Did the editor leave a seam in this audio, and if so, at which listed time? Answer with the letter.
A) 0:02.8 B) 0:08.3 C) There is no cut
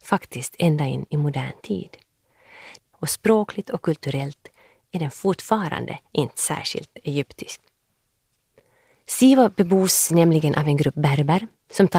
A